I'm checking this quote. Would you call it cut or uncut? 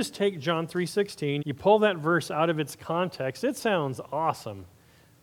cut